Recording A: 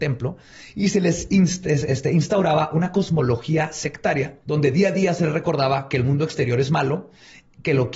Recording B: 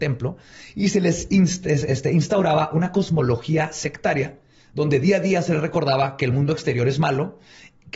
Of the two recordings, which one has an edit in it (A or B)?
A